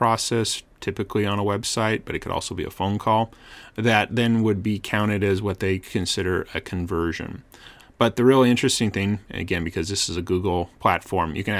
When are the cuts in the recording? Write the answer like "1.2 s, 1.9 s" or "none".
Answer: 7.8 s